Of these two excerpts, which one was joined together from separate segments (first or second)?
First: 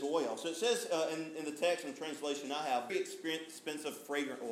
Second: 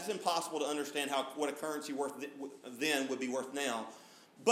first